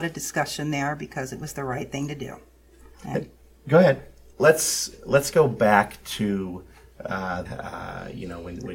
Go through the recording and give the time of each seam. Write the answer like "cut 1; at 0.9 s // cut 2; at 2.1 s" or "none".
cut 1; at 2.9 s // cut 2; at 4.3 s // cut 3; at 7.4 s